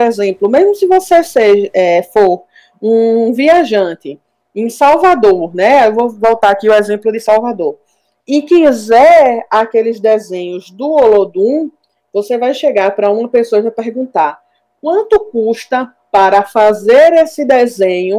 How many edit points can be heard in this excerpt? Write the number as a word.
zero